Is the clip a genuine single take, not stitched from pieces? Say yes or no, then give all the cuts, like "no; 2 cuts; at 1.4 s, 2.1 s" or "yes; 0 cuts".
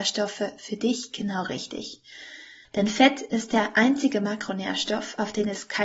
no; 1 cut; at 2.6 s